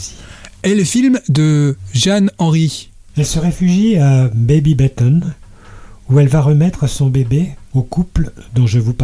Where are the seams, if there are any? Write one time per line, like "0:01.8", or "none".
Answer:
0:03.1
0:07.7